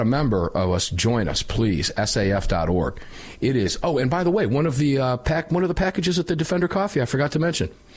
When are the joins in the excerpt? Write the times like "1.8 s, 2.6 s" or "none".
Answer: none